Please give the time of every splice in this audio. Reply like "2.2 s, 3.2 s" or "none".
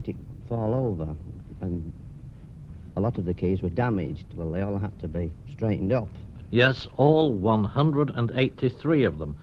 none